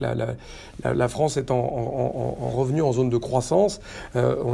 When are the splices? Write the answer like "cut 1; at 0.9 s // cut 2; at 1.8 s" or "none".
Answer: none